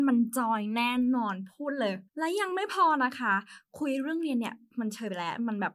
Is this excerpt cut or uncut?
cut